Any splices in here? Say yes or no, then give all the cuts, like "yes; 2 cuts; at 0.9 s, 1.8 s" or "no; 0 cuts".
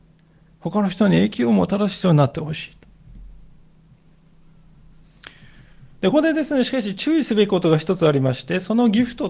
yes; 1 cut; at 6.1 s